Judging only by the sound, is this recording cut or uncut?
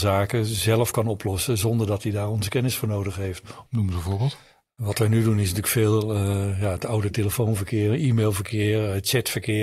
cut